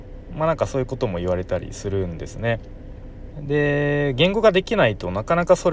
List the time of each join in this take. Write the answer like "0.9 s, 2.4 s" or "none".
3.3 s